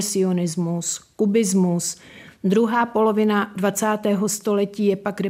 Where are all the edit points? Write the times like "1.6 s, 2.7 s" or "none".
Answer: none